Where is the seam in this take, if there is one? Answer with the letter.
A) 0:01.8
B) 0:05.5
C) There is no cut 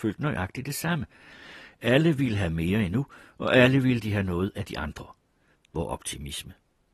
B